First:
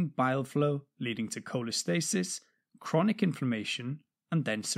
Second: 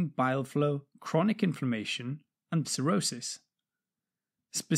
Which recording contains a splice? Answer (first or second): second